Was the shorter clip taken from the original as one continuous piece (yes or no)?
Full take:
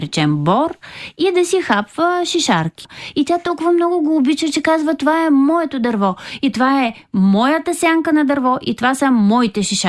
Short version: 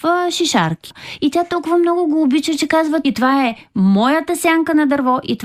no